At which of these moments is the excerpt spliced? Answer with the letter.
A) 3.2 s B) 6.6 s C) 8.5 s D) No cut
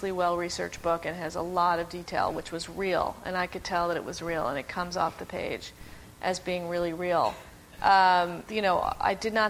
C